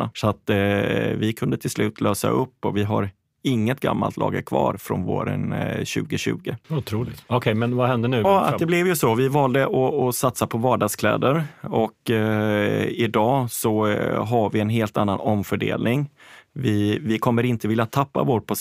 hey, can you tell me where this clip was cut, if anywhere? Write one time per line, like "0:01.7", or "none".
0:08.2